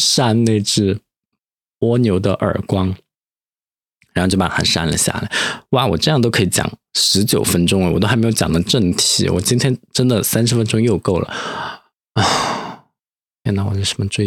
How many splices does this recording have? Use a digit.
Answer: 0